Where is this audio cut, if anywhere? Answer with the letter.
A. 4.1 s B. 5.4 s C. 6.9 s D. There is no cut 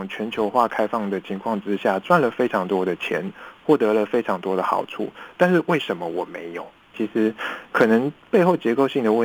C